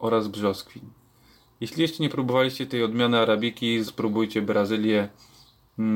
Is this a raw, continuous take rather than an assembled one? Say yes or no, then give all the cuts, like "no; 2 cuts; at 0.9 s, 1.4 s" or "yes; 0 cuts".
no; 1 cut; at 3.9 s